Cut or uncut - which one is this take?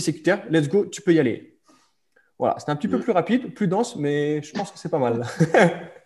uncut